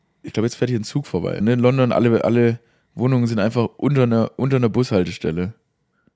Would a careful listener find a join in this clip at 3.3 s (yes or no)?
no